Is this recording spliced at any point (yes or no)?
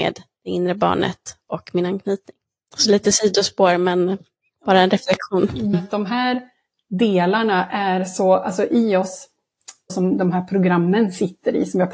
yes